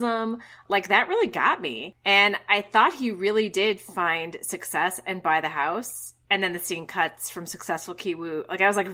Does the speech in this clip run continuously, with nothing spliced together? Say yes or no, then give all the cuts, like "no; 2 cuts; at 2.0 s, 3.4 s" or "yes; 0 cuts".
yes; 0 cuts